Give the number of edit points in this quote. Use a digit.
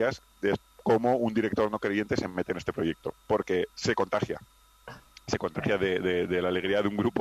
0